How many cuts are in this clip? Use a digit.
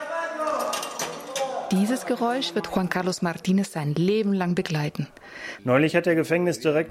1